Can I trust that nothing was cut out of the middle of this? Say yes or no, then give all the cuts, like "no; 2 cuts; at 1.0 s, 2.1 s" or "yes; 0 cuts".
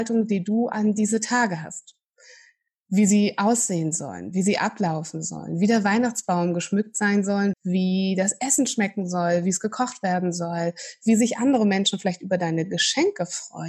no; 1 cut; at 7.5 s